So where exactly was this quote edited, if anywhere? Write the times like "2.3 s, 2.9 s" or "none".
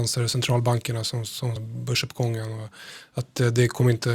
1.6 s